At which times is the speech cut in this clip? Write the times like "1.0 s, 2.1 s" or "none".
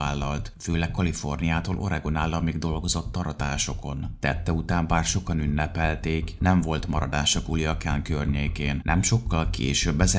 4.2 s, 8.8 s